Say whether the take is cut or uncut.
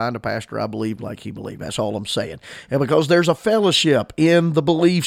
uncut